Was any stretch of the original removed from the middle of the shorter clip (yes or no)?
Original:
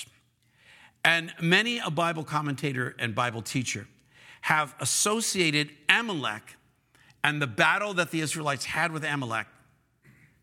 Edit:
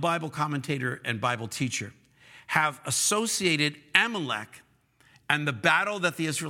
no